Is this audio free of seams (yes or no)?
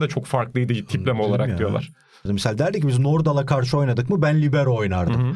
no